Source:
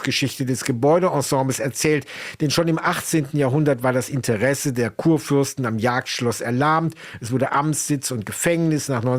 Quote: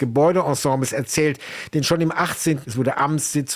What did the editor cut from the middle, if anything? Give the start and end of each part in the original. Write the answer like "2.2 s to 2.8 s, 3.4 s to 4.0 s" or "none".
3.3 s to 7.2 s

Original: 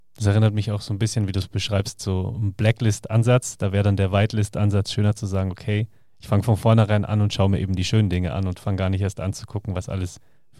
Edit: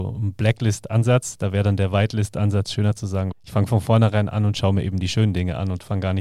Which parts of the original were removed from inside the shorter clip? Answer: 5.5 s to 6.1 s

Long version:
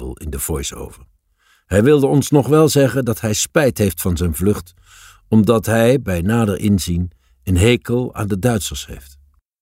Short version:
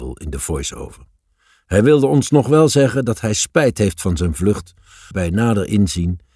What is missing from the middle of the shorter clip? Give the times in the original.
5.1 s to 6.0 s

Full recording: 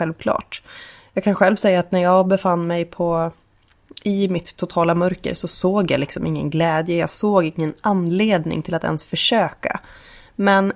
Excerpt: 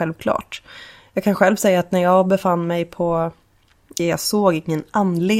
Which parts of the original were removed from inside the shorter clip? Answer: 4.0 s to 6.9 s

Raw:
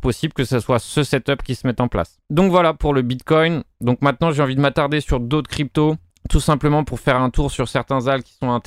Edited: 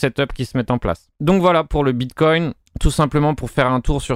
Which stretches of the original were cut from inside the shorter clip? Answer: 3.7 s to 6.1 s

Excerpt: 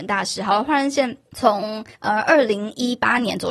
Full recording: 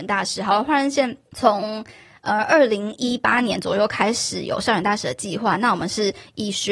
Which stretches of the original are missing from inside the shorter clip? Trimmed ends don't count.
1.9 s to 2.2 s

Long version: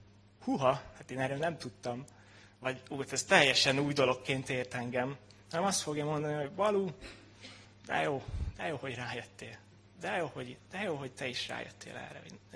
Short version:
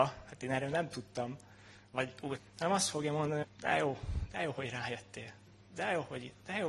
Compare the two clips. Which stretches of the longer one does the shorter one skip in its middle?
3.1 s to 5.3 s, 6.4 s to 7.7 s

